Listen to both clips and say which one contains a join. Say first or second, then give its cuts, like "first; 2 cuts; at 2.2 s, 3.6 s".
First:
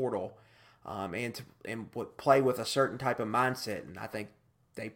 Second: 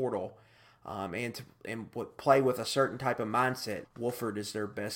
second; 1 cut; at 3.8 s